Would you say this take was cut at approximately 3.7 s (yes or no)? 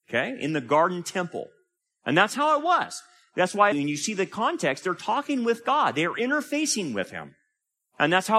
yes